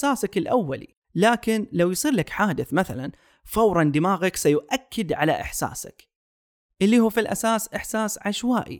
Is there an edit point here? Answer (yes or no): yes